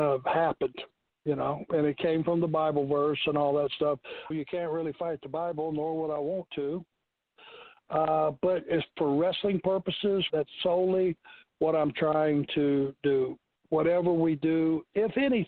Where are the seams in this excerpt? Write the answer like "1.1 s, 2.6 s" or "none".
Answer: 4.3 s, 10.3 s